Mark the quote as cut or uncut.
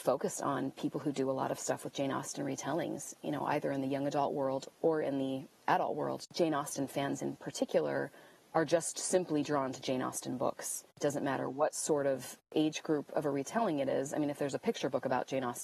uncut